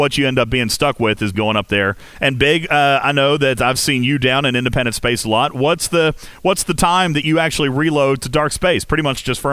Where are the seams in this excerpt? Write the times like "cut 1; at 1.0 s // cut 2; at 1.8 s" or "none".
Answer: cut 1; at 1.3 s